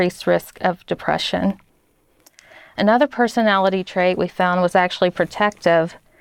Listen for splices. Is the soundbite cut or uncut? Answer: uncut